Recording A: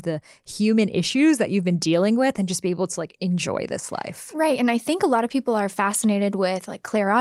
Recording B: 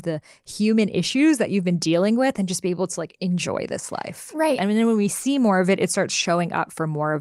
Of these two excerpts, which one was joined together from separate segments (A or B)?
B